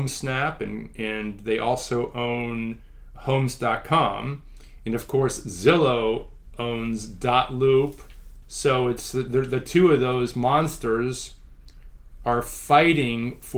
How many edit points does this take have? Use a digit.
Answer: 1